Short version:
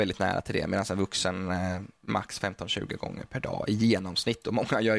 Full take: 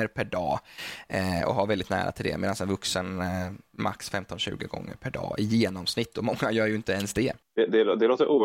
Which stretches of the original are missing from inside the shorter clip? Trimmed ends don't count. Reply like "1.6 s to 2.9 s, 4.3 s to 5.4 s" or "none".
none